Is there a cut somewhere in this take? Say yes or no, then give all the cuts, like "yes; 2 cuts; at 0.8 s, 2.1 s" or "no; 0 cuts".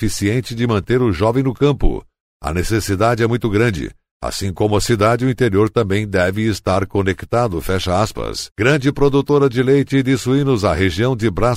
yes; 1 cut; at 2.3 s